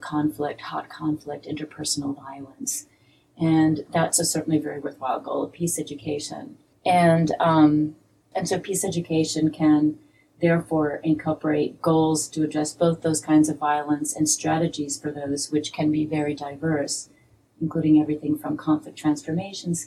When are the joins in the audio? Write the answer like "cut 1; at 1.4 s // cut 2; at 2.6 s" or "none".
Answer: cut 1; at 6.7 s // cut 2; at 8.3 s